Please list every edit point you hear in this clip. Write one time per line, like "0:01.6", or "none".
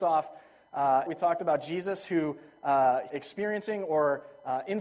0:01.1
0:03.1